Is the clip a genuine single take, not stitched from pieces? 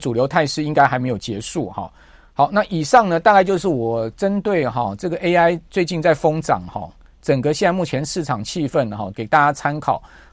no; 1 cut; at 9.1 s

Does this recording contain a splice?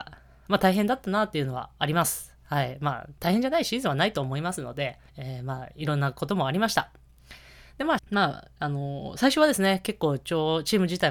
yes; 2 cuts; at 5.1 s, 8.0 s

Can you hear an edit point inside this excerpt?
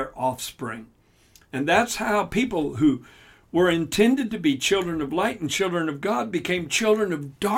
no; 0 cuts

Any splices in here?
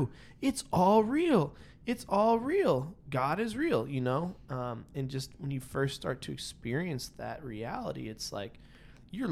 no; 0 cuts

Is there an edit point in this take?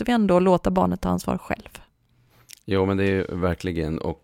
no; 0 cuts

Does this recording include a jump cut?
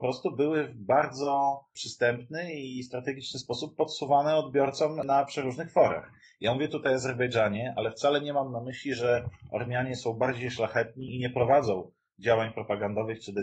yes; 1 cut; at 11.1 s

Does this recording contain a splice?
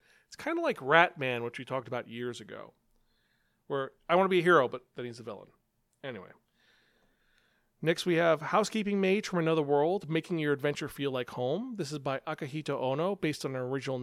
no; 0 cuts

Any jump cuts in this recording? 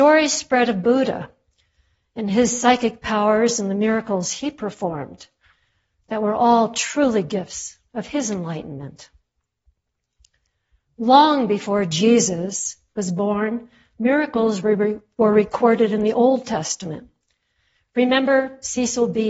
no; 0 cuts

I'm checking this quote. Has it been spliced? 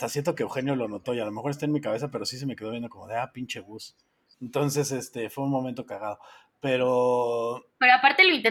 yes; 1 cut; at 4.3 s

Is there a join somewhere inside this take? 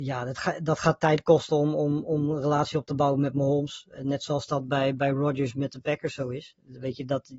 no; 0 cuts

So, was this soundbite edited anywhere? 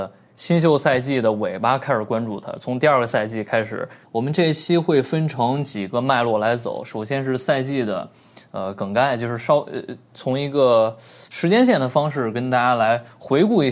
yes; 1 cut; at 4.0 s

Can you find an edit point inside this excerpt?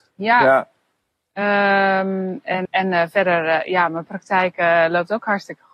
yes; 1 cut; at 2.7 s

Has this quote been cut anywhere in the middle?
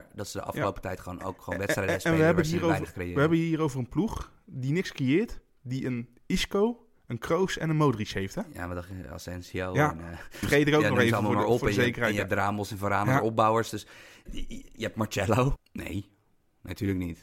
yes; 3 cuts; at 10.4 s, 14.3 s, 15.6 s

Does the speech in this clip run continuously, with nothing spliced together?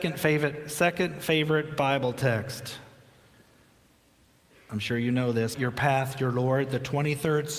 no; 1 cut; at 5.5 s

